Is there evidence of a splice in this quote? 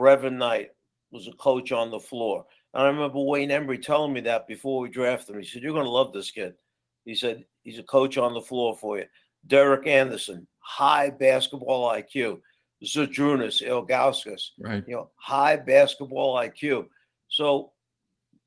no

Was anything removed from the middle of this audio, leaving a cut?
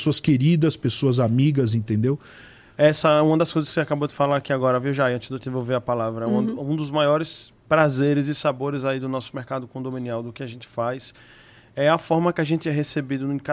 no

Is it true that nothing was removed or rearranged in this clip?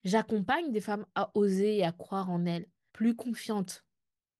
no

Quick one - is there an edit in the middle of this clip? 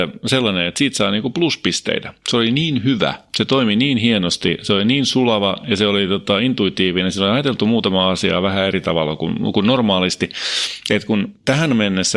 no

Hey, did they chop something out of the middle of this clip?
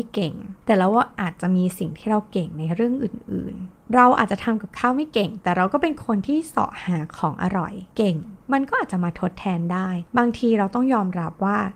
yes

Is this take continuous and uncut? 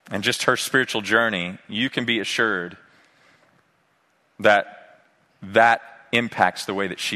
yes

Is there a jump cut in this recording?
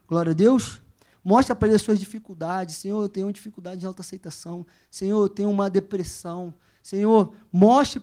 yes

